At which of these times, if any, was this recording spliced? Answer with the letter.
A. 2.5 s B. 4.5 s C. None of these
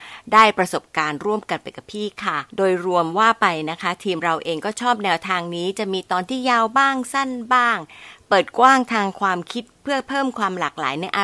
A